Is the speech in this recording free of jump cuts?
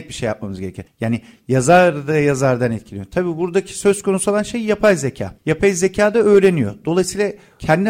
yes; 0 cuts

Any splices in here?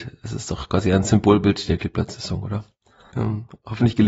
yes; 1 cut; at 3.1 s

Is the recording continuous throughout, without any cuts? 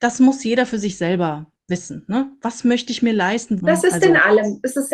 no; 1 cut; at 3.6 s

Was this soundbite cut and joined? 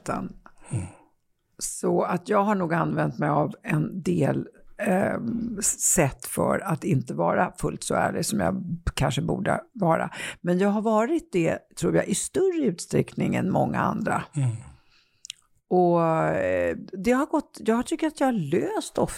no; 0 cuts

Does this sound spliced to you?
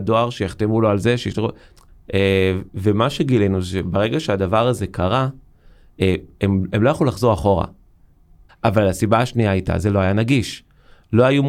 yes; 2 cuts; at 1.9 s, 8.5 s

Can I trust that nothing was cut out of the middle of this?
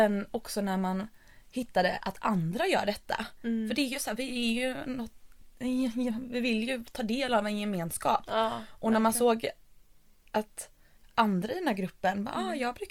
yes; 0 cuts

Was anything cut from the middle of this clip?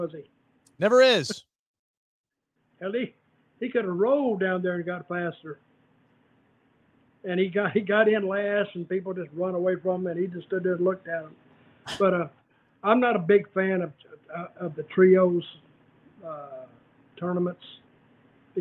no; 0 cuts

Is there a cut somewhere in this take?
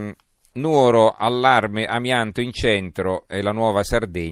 no; 0 cuts

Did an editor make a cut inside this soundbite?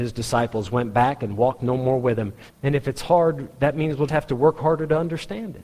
yes; 2 cuts; at 2.5 s, 4.1 s

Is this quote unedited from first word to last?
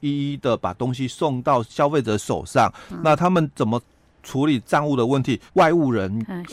no; 1 cut; at 5.5 s

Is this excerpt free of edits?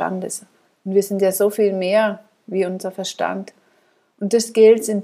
yes; 0 cuts

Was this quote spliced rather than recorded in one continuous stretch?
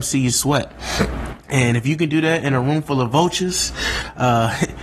no; 0 cuts

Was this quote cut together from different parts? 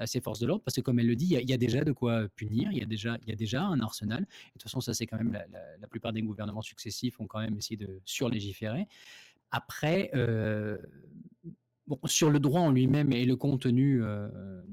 yes; 1 cut; at 9.4 s

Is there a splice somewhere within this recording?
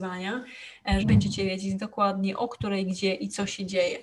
yes; 1 cut; at 1.0 s

